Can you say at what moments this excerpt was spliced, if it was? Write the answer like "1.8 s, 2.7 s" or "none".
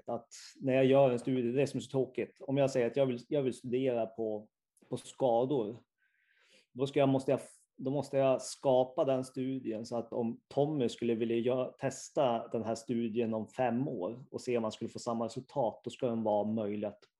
none